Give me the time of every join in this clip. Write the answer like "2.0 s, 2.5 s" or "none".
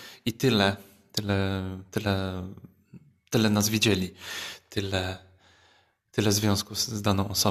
none